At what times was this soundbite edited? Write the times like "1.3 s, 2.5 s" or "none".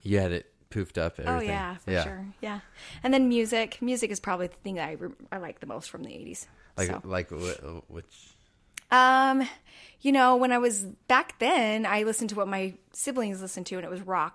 5.3 s